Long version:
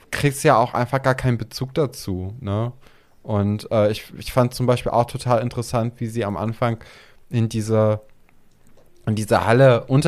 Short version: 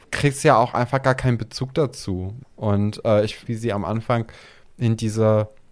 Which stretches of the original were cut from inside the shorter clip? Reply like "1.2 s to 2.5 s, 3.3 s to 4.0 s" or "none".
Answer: 2.4 s to 3.1 s, 4.1 s to 6.0 s